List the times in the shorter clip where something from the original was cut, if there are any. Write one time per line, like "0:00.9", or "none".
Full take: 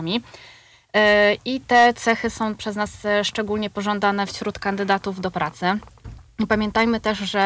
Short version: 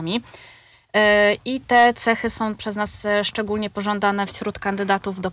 none